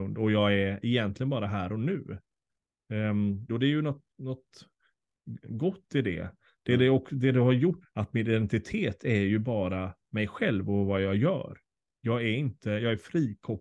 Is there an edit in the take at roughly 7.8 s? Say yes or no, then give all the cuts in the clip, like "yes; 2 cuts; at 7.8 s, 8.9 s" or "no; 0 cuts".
yes; 2 cuts; at 3.5 s, 7.8 s